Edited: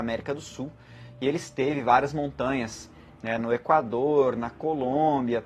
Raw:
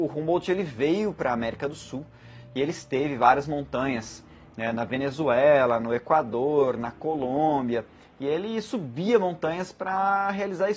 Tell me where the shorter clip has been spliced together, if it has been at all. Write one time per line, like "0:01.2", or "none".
0:03.4